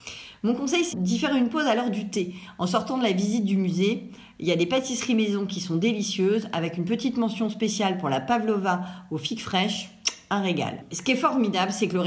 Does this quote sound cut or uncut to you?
cut